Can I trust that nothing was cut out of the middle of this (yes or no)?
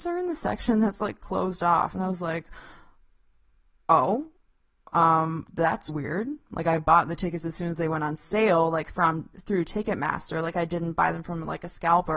no